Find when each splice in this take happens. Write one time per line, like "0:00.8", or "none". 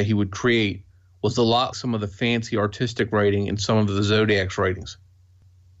0:01.7